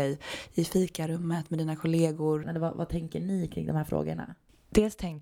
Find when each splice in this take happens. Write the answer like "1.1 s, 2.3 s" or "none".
2.4 s